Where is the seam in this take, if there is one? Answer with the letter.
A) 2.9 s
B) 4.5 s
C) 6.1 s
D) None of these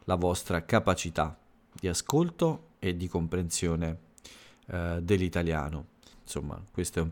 C